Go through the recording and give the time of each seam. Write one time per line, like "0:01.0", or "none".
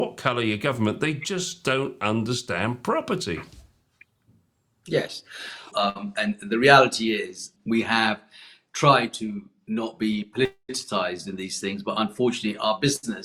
0:05.7
0:07.6